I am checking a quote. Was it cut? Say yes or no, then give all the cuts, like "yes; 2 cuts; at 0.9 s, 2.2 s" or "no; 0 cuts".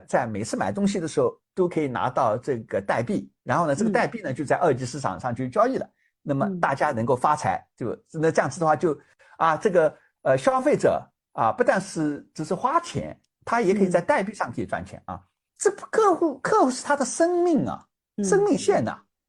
yes; 1 cut; at 15.5 s